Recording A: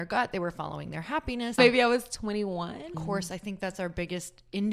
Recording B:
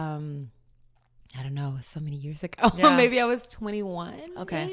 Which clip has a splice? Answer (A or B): A